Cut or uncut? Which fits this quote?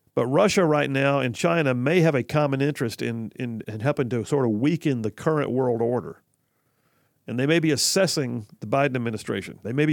cut